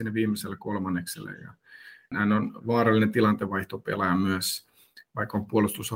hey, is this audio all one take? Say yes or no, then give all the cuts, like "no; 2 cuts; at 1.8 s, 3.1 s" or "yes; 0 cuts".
no; 1 cut; at 2.1 s